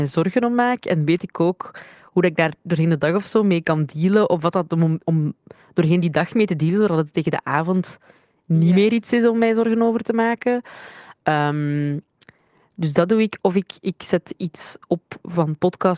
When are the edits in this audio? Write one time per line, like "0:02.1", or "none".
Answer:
0:05.0